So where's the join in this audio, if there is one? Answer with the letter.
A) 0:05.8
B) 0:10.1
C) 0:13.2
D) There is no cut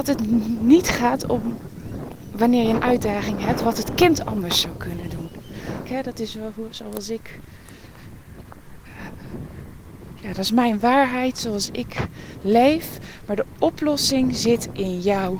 A